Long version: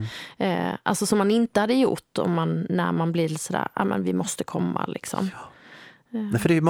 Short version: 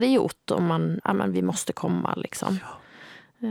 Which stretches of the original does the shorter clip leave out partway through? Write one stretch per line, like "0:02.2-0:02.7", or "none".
0:02.7-0:03.7

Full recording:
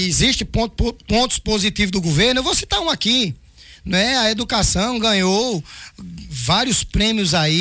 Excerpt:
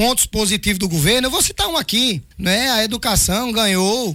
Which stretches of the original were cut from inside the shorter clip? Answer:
0:03.4-0:03.8

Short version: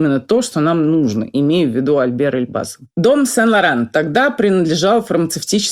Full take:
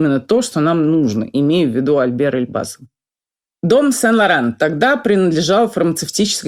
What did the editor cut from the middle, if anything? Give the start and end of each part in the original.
0:02.9-0:03.6

